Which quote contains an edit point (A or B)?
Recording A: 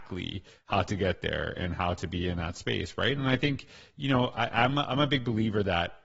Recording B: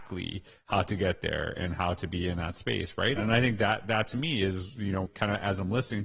B